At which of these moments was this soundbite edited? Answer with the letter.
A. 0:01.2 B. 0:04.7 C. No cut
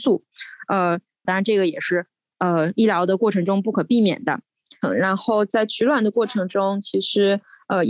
A